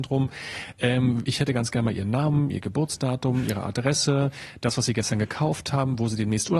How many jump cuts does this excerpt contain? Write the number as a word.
zero